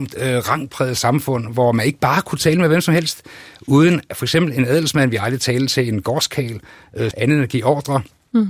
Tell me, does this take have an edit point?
yes; 1 cut; at 7.1 s

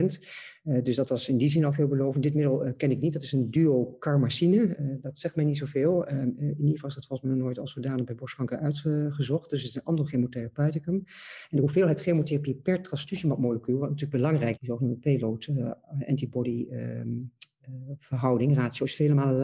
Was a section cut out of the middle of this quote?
yes; 1 cut; at 14.6 s

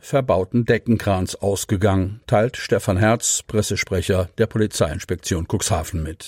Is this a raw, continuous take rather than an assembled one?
yes; 0 cuts

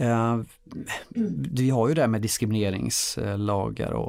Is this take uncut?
yes; 0 cuts

